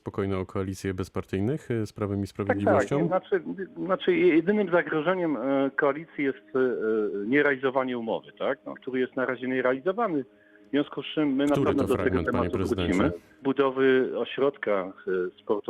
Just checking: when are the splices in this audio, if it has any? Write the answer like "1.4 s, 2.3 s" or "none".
8.7 s, 13.4 s